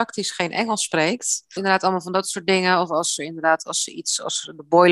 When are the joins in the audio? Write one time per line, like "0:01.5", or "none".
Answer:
0:01.6